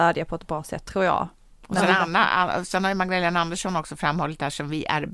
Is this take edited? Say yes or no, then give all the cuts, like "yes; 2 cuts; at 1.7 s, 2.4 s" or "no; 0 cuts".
no; 0 cuts